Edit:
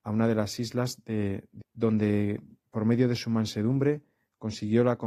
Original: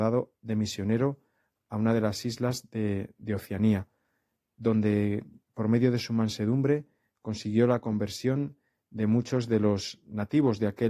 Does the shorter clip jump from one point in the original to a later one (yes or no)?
yes